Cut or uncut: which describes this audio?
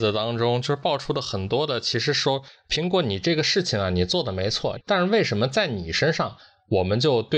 cut